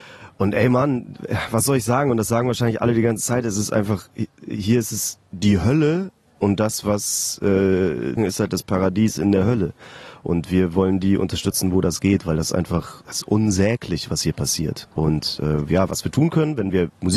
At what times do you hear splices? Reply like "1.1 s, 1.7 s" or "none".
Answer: 8.2 s, 14.8 s